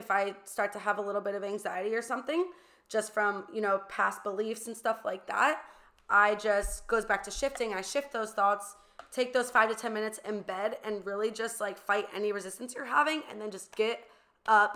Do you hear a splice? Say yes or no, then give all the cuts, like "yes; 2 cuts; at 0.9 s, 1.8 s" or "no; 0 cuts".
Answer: no; 0 cuts